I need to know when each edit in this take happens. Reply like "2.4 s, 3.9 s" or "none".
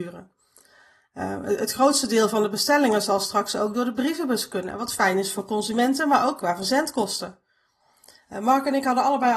8.2 s